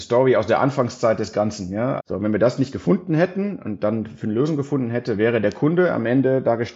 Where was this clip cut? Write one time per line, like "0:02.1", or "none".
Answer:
0:02.0

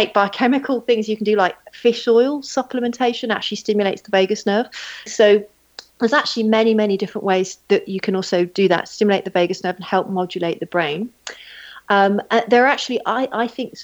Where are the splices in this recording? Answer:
0:05.1

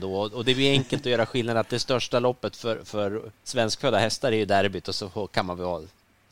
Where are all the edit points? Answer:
0:03.3

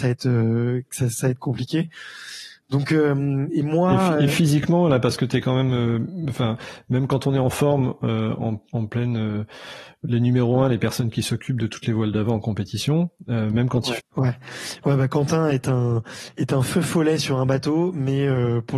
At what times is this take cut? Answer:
0:14.0

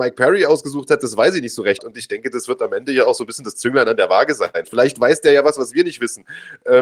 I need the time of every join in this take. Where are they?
0:01.8
0:04.6

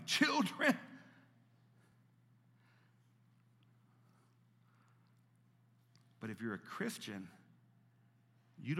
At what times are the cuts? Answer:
none

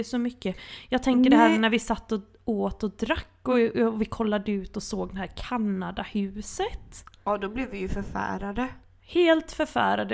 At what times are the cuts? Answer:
none

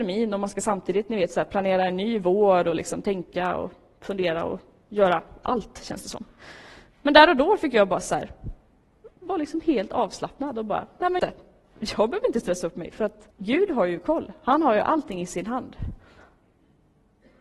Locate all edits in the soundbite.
0:11.2
0:13.3

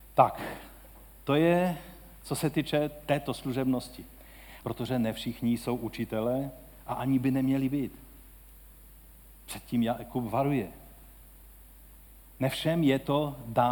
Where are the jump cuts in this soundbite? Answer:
0:04.6

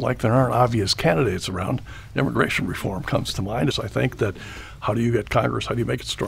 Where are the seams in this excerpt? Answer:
0:03.7

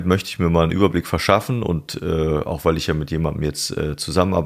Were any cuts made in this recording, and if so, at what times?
none

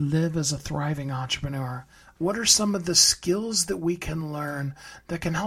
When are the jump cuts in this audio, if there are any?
0:02.2

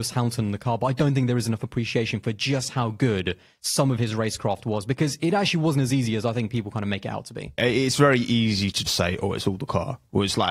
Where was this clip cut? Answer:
0:07.6
0:08.9

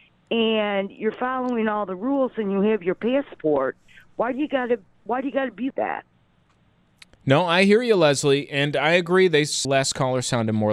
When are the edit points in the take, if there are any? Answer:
0:05.7
0:09.6

